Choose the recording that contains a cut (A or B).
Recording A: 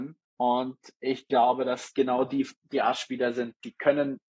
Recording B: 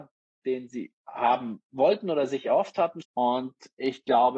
B